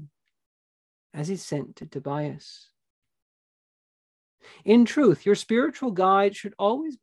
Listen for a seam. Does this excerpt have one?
no; 0 cuts

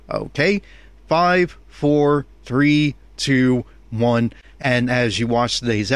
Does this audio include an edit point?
yes; 1 cut; at 4.5 s

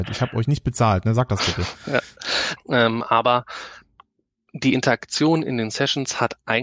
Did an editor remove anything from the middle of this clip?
yes; 1 cut; at 2.6 s

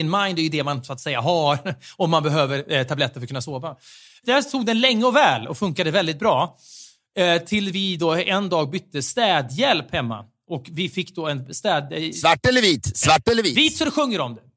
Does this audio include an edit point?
no; 0 cuts

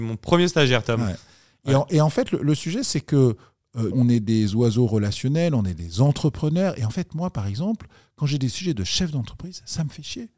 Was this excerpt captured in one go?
no; 1 cut; at 3.9 s

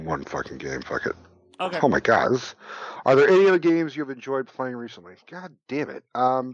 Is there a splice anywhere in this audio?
no; 0 cuts

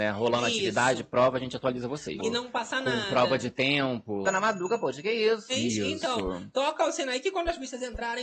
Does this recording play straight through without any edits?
no; 3 cuts; at 2.2 s, 4.2 s, 5.5 s

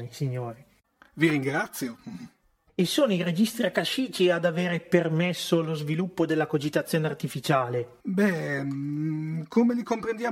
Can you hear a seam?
yes; 1 cut; at 8.0 s

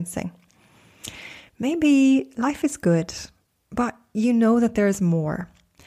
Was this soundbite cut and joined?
no; 0 cuts

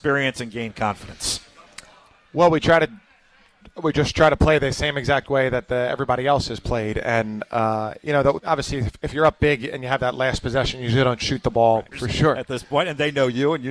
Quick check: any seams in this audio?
yes; 2 cuts; at 8.4 s, 11.9 s

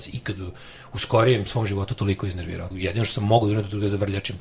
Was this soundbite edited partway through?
yes; 1 cut; at 2.7 s

